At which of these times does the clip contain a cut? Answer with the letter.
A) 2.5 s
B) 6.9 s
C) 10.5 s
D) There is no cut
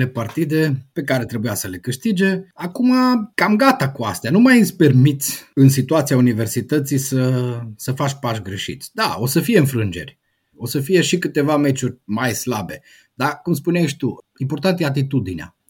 C